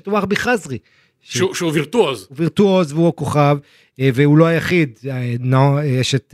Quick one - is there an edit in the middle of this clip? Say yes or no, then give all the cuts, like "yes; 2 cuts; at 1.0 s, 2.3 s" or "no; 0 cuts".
no; 0 cuts